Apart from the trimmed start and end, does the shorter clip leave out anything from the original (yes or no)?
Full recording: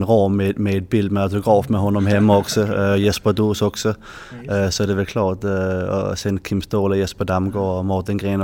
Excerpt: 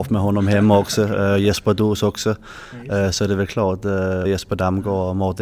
yes